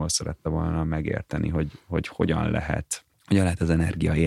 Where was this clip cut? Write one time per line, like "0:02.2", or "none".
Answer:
0:03.1